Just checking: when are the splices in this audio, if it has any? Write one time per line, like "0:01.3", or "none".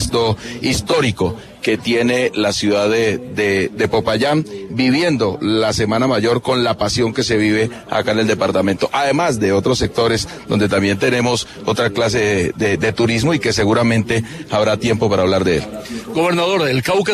none